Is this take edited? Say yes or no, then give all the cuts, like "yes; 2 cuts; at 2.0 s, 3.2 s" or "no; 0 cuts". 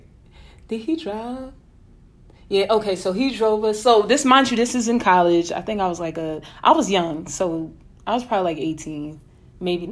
no; 0 cuts